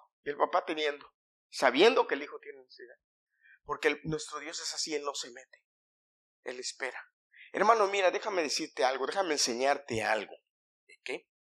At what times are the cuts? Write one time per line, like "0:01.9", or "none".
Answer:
none